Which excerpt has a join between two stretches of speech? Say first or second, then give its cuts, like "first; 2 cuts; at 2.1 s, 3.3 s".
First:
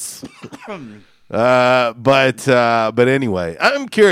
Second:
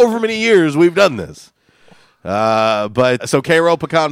second; 1 cut; at 3.2 s